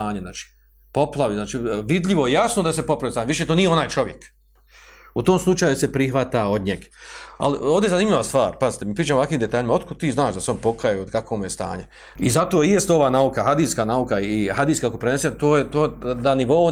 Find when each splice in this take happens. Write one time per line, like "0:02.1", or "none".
0:12.2